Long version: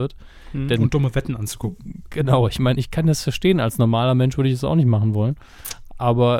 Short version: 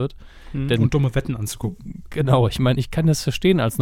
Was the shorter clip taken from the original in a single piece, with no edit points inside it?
yes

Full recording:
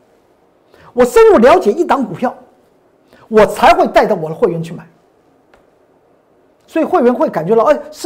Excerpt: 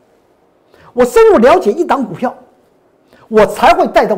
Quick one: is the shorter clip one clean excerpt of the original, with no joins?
yes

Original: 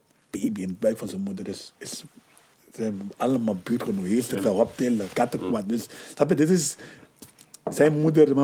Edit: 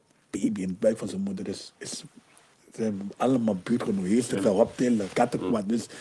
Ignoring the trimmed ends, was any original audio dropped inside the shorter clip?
no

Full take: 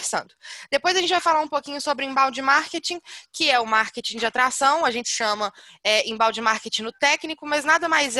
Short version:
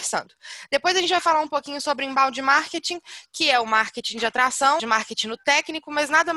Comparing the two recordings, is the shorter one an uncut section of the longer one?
no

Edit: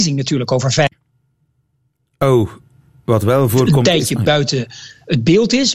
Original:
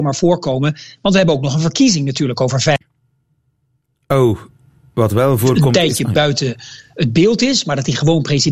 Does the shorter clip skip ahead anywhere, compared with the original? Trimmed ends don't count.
no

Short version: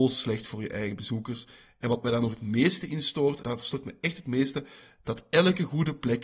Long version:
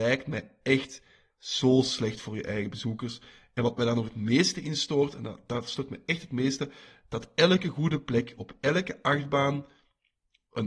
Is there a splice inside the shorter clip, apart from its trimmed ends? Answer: yes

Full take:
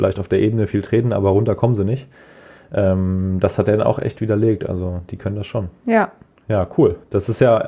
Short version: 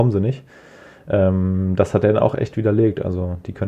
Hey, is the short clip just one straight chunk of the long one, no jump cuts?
yes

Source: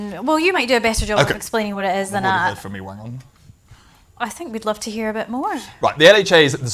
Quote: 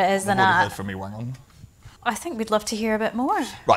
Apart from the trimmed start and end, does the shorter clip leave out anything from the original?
yes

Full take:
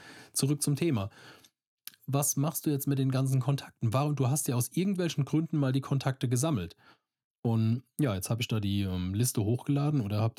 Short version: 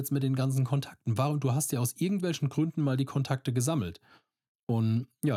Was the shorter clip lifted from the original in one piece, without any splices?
yes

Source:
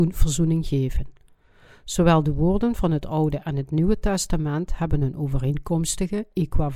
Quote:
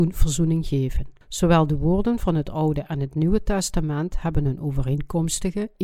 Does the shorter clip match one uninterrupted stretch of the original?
no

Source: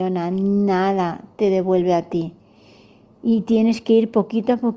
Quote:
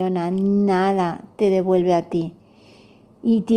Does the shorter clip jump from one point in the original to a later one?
no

